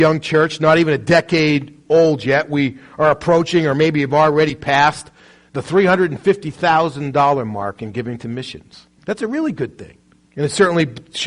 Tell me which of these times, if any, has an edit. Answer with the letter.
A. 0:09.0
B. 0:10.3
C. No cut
A